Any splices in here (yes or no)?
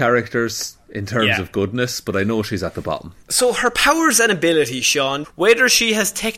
yes